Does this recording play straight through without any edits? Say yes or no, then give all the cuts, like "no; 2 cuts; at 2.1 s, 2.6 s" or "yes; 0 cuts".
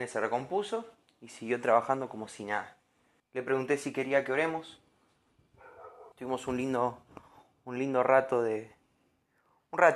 no; 2 cuts; at 3.2 s, 6.1 s